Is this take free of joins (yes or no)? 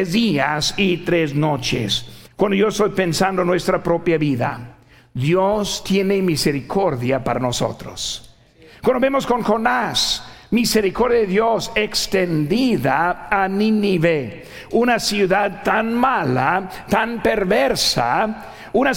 no